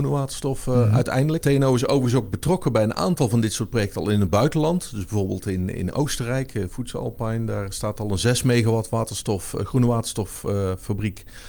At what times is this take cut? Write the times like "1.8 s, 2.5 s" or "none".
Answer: 1.4 s